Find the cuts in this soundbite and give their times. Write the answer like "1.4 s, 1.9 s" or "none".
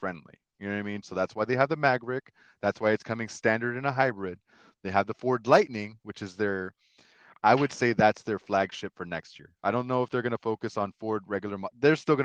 1.0 s